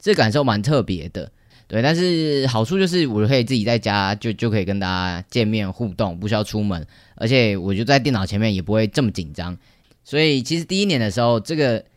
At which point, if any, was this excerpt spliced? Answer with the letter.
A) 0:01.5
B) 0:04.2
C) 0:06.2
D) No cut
A